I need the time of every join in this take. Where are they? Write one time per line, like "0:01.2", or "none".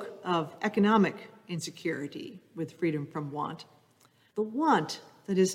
0:04.3